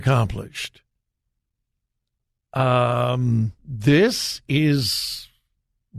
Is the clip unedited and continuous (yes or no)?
no